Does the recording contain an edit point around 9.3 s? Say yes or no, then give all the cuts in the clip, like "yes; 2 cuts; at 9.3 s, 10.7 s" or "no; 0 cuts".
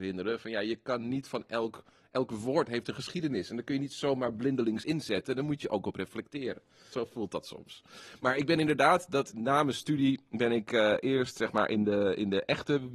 yes; 2 cuts; at 6.9 s, 9.3 s